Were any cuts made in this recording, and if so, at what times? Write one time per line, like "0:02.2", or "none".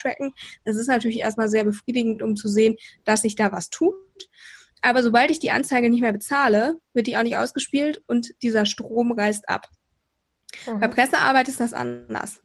none